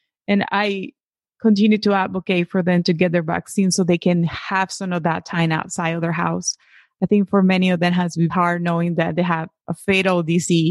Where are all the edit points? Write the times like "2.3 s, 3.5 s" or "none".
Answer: 8.3 s